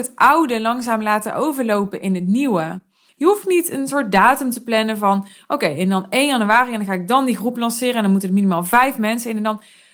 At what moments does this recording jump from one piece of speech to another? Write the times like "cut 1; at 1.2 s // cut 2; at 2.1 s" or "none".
cut 1; at 3.1 s